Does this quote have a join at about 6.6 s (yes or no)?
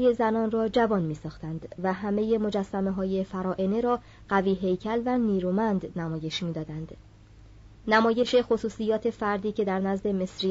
no